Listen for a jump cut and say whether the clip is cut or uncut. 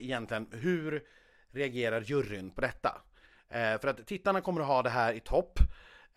uncut